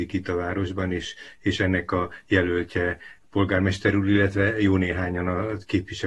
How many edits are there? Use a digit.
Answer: 0